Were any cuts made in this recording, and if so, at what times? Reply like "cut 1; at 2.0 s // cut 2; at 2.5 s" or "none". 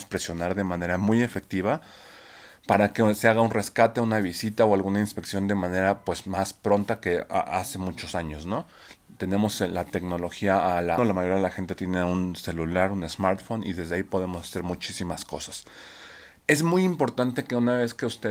cut 1; at 11.0 s

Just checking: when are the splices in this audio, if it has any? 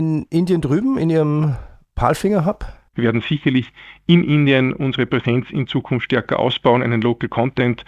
cut 1; at 2.9 s

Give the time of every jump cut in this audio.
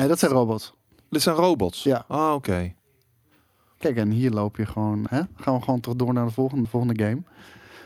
cut 1; at 5.1 s // cut 2; at 6.7 s

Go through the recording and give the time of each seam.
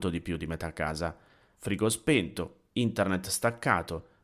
cut 1; at 1.5 s

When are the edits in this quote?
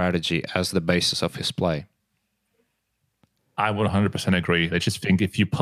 cut 1; at 4.7 s

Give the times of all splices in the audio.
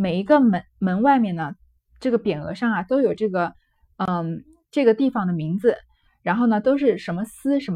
none

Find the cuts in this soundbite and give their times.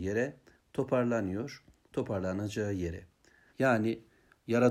cut 1; at 3.5 s

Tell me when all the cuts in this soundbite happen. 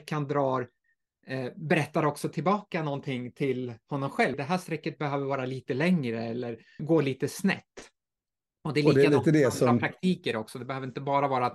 cut 1; at 4.3 s // cut 2; at 6.8 s

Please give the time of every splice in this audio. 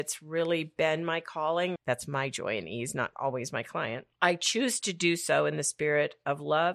cut 1; at 1.8 s

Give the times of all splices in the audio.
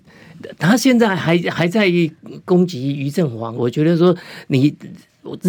cut 1; at 3.6 s

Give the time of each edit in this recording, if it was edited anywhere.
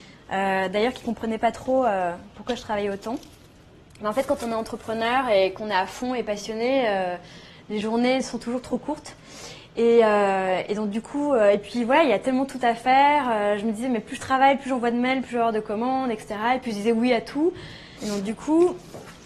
cut 1; at 18.0 s

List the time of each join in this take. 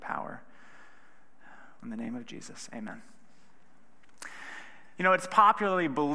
cut 1; at 1.8 s

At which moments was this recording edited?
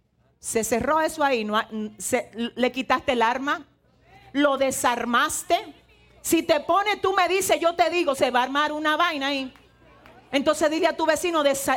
none

